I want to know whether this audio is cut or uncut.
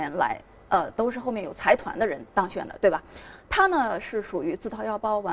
uncut